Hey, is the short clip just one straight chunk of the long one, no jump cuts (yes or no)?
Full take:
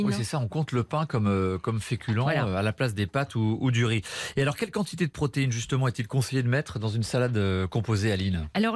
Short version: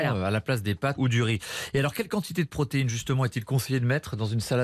no